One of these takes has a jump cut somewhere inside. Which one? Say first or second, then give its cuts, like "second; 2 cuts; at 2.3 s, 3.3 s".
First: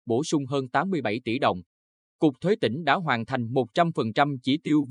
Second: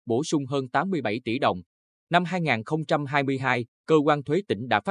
second; 2 cuts; at 2.0 s, 3.7 s